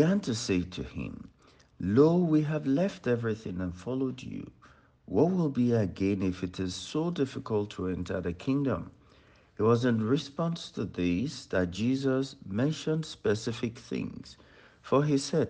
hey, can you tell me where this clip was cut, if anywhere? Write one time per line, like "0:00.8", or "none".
none